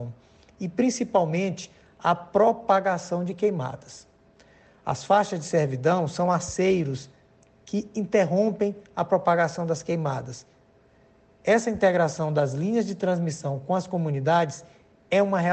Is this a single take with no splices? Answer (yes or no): yes